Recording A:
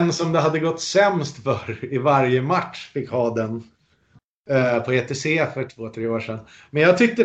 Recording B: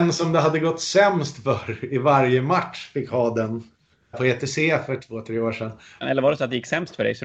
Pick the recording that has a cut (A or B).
B